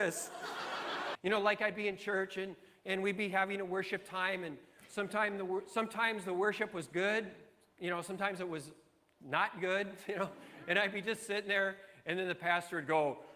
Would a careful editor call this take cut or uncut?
cut